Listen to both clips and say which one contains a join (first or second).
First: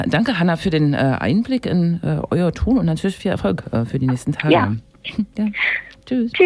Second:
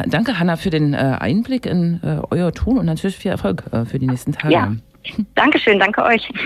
first